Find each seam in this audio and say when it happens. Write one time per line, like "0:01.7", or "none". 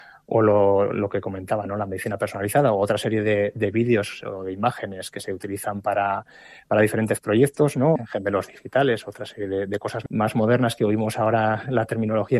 0:08.0